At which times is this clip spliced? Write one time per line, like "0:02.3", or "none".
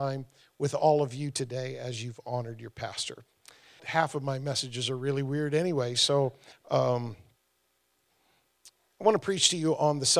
0:03.8
0:06.5